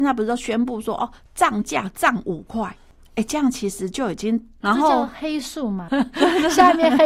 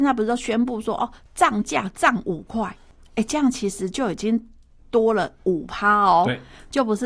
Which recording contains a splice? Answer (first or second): first